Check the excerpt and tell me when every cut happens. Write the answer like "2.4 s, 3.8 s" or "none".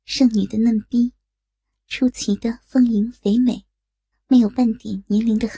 4.1 s